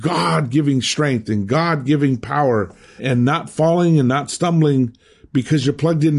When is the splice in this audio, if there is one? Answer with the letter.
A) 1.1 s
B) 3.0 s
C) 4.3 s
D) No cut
B